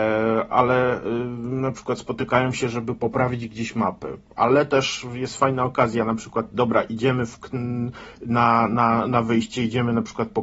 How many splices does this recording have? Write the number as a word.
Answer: zero